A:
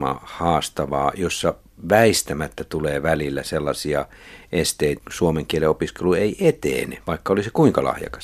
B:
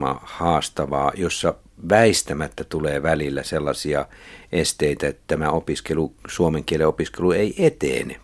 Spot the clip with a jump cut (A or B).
A